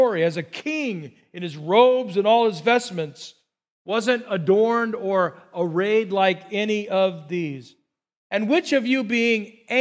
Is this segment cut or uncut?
cut